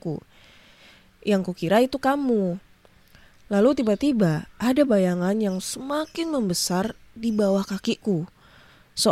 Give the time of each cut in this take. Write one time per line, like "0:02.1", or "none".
none